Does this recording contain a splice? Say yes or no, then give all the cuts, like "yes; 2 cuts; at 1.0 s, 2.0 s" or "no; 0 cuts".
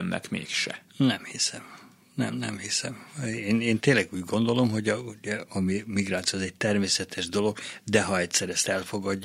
no; 0 cuts